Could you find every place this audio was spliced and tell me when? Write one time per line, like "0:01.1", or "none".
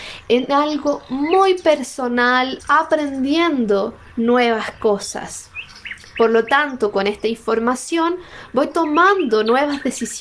0:02.6